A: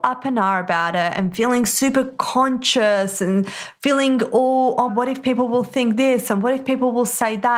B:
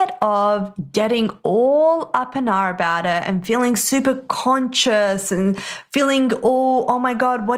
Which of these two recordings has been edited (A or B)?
A